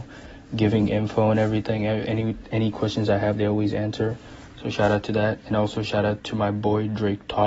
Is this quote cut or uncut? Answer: uncut